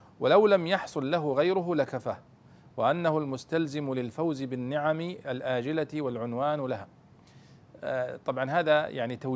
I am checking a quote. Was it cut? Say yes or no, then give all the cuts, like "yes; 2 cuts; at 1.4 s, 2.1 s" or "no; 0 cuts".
no; 0 cuts